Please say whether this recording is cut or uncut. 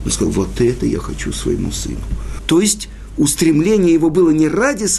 cut